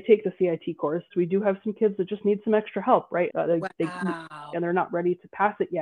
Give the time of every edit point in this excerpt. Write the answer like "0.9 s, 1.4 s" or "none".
1.1 s, 3.3 s, 4.5 s